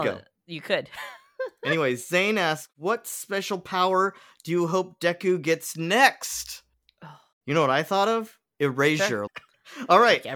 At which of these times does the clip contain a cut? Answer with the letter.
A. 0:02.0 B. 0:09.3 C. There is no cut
B